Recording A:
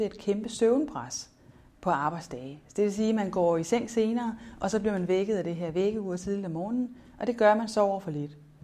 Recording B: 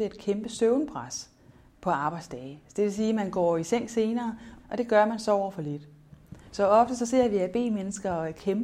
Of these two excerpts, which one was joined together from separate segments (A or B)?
B